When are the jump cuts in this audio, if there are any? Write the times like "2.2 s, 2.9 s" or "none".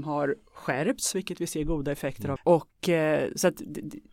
2.4 s